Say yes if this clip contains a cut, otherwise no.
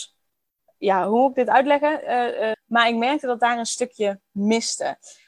yes